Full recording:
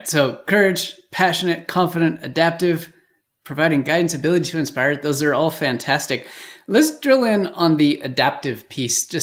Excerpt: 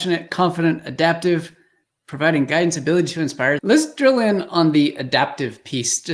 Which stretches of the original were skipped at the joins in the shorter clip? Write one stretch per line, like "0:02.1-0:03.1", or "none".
0:05.0-0:06.6

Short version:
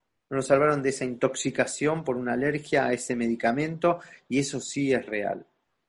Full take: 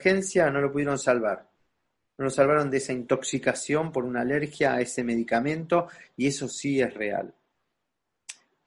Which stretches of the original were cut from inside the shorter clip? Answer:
none

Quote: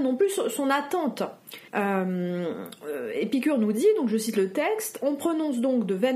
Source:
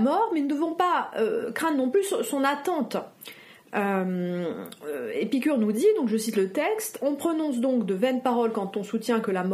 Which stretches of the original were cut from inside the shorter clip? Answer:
0:03.4-0:03.7

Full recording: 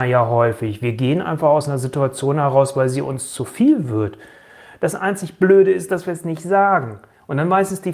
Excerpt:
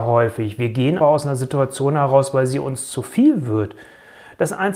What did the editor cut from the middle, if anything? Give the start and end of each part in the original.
0:01.2-0:01.4

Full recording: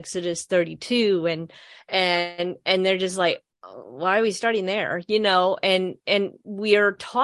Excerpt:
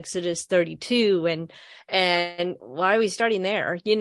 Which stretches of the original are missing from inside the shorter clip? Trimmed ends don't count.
0:02.6-0:03.8

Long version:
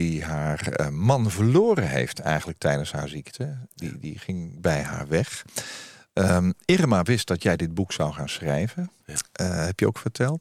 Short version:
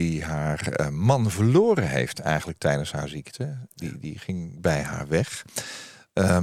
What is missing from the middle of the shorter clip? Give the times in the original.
none

